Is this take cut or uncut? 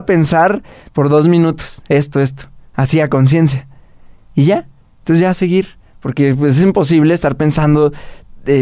uncut